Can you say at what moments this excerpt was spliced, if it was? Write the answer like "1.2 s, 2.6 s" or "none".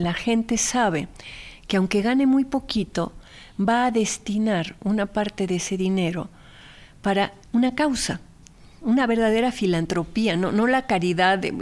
7.4 s